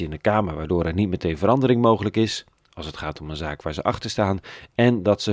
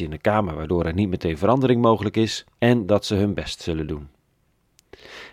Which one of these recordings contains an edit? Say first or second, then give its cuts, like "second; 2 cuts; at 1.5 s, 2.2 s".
second; 1 cut; at 2.5 s